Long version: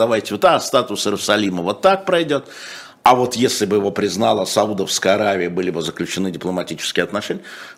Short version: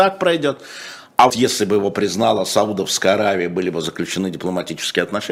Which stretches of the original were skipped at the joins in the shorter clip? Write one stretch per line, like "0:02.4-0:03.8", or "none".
0:03.2-0:03.3